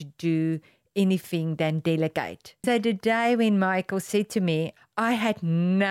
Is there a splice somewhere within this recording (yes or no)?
yes